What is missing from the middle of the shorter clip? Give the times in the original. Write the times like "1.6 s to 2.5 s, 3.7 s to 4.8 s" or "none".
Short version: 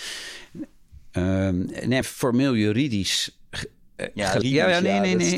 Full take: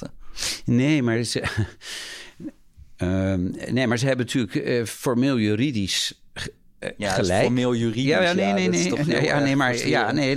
3.9 s to 4.8 s, 7.2 s to 7.9 s

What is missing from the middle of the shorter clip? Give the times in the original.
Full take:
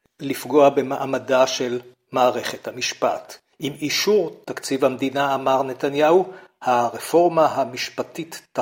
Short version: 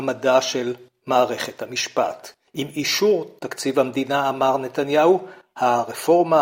none

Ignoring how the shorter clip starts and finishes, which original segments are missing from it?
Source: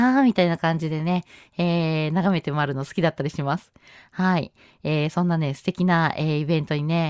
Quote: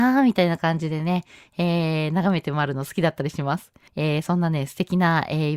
3.9 s to 4.8 s

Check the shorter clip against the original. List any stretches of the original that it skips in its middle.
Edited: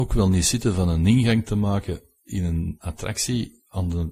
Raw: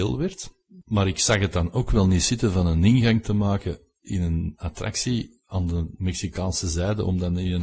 none

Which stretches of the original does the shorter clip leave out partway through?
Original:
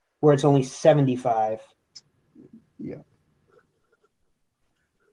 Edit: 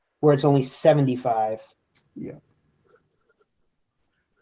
2.1 s to 2.7 s

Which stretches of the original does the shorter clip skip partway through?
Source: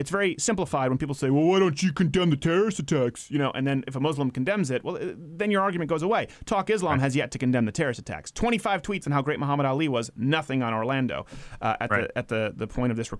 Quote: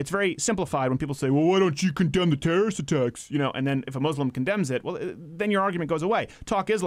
none

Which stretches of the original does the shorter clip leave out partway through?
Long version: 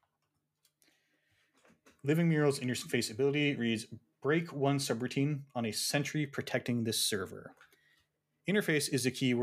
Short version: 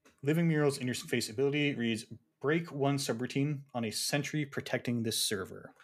none

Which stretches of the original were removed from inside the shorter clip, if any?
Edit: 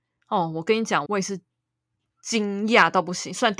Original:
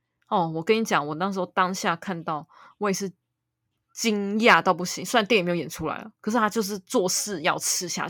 1.1 s to 2.8 s

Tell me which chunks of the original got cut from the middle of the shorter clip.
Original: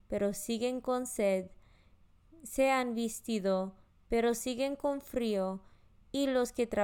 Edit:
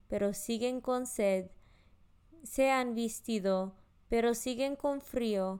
none

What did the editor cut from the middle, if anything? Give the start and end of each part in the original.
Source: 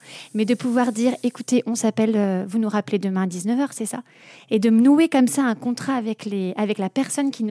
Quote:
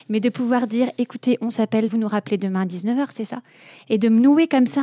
2.1 s to 2.5 s

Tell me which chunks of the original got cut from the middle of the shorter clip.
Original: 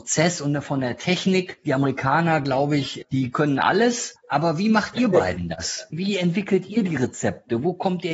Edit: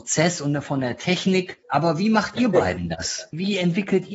1.6 s to 4.2 s

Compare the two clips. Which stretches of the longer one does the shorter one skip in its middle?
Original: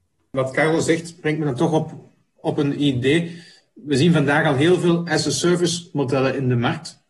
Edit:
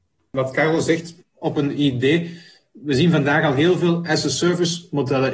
1.2 s to 2.2 s

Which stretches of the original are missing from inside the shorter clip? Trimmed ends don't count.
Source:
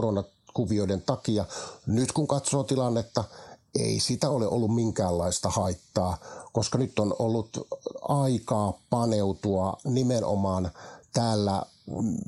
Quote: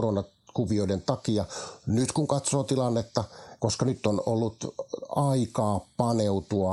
3.6 s to 6.5 s

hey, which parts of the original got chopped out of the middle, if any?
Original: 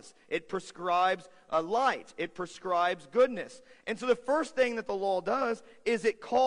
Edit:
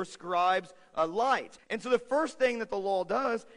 2.1 s to 3.8 s

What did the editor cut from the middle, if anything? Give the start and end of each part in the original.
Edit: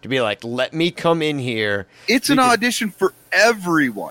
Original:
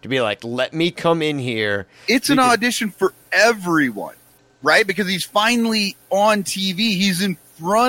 none

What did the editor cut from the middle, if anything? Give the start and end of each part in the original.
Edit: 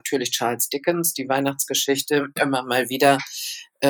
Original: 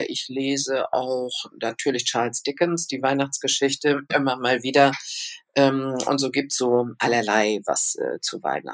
none

